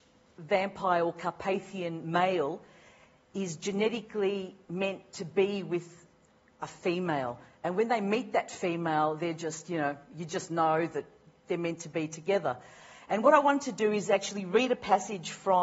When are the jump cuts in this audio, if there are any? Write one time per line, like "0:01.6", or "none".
none